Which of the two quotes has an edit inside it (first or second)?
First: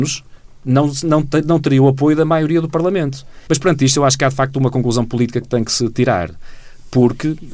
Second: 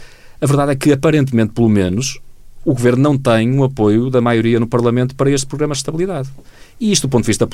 first